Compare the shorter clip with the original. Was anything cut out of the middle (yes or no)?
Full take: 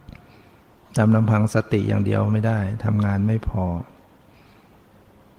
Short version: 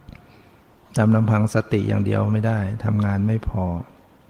no